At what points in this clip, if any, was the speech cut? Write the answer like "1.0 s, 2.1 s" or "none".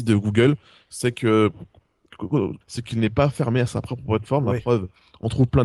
2.6 s